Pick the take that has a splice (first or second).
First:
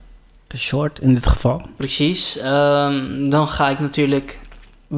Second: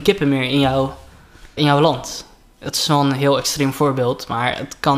second